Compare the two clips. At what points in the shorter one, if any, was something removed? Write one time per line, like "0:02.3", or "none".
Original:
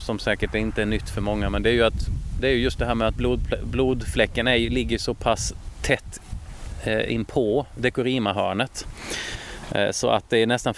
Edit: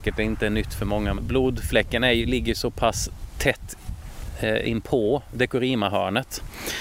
0:01.2